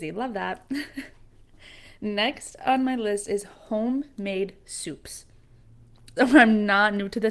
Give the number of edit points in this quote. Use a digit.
1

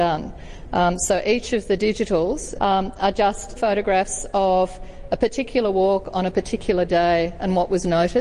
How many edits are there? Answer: 2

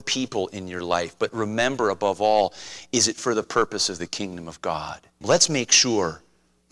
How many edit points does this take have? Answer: 1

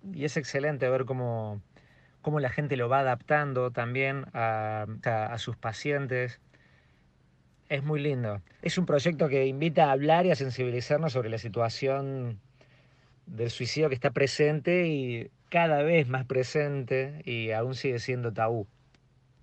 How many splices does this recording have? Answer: 2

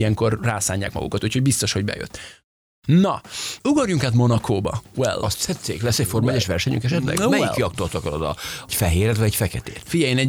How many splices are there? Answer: 0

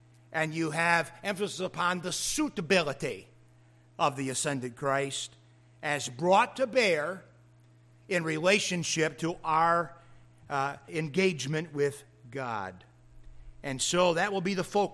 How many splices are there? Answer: 1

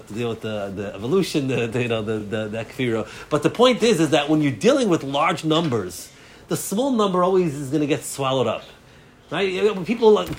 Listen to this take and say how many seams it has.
0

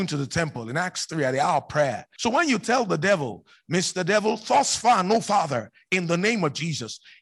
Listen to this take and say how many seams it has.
1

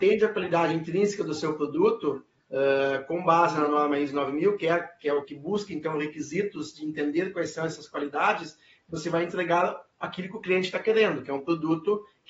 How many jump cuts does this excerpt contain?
0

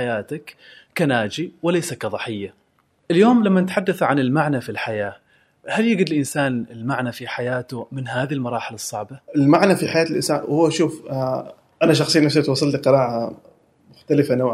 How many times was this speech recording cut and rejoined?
1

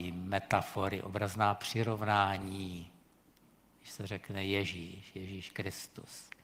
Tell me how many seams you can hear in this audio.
0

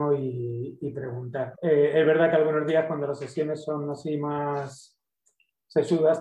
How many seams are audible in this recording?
1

